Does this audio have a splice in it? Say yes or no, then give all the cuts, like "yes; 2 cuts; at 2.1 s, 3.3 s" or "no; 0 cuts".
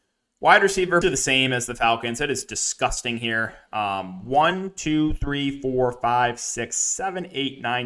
yes; 1 cut; at 1.0 s